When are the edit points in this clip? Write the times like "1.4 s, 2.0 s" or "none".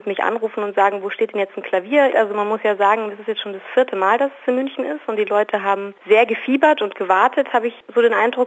2.1 s, 6.0 s